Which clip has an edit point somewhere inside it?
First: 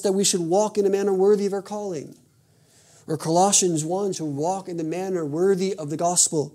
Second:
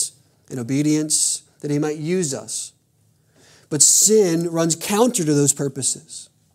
first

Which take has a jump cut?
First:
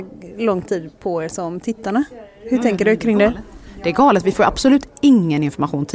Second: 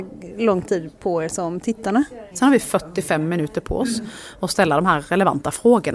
second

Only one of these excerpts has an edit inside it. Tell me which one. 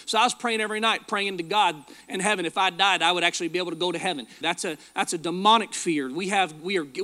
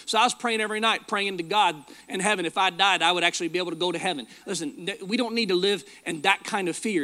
first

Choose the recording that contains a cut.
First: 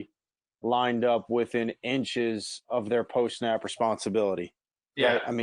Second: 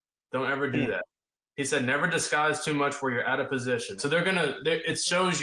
second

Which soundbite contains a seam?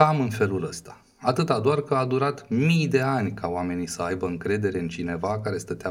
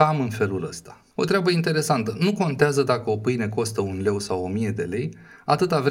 second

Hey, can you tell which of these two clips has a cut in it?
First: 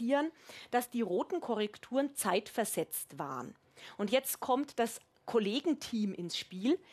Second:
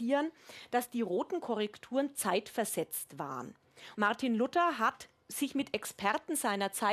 second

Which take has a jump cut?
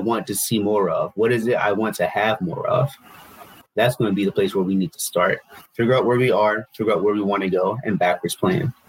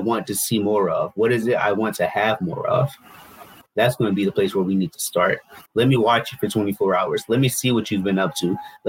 second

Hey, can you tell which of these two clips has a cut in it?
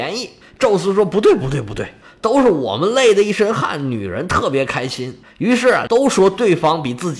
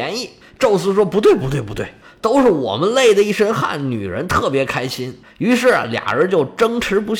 first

